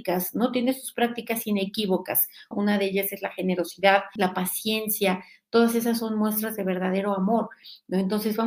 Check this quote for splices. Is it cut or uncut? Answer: cut